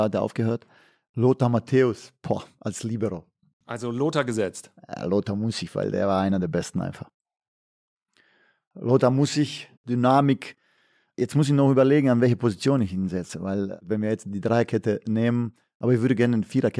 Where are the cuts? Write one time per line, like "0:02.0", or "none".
0:09.8